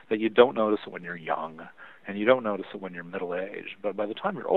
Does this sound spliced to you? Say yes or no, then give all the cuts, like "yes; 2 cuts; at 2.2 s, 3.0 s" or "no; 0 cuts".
no; 0 cuts